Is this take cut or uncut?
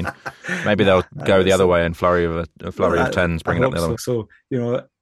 cut